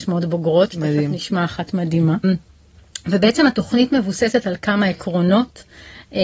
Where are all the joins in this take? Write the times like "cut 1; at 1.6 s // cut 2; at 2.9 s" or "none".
cut 1; at 2.2 s